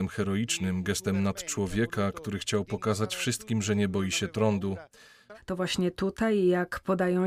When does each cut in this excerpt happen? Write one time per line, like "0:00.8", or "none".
0:05.3